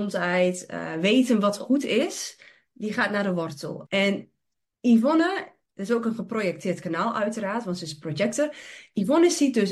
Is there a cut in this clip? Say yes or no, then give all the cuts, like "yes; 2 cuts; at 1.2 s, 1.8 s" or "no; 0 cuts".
yes; 2 cuts; at 3.8 s, 5.6 s